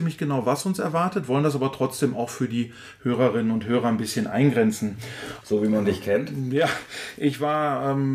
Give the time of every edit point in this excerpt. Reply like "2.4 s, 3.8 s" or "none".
5.4 s